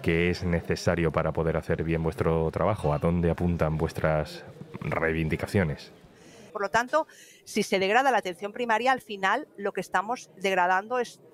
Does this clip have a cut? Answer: yes; 1 cut; at 6.5 s

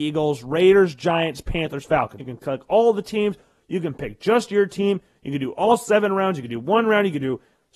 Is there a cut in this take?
yes; 1 cut; at 2.2 s

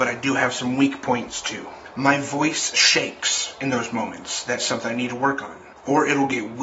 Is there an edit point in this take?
no; 0 cuts

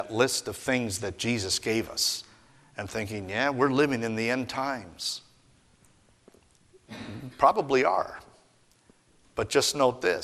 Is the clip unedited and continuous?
yes; 0 cuts

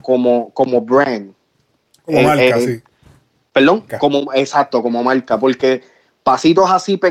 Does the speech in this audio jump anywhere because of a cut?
yes; 1 cut; at 3.9 s

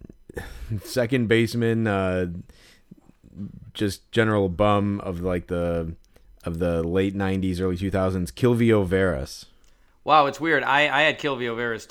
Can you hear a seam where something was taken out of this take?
no; 0 cuts

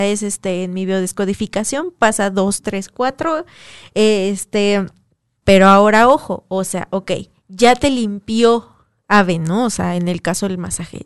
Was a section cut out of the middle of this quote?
yes; 1 cut; at 5.4 s

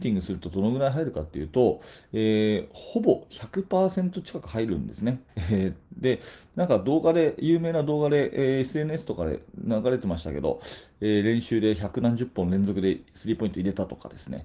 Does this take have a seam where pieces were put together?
no; 0 cuts

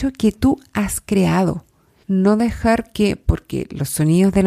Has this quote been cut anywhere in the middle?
yes; 1 cut; at 2.0 s

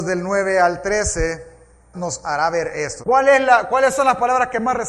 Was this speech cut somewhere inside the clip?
yes; 2 cuts; at 1.9 s, 3.0 s

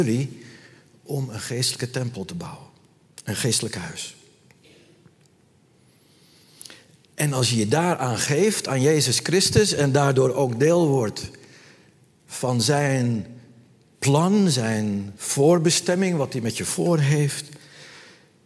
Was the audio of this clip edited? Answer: no; 0 cuts

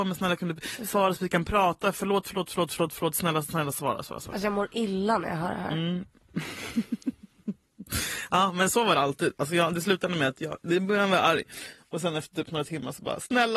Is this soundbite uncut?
yes; 0 cuts

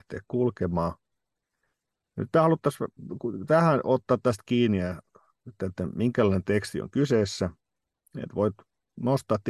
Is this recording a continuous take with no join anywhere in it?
yes; 0 cuts

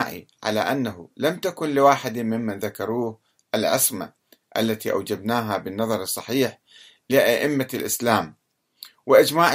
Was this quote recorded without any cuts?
yes; 0 cuts

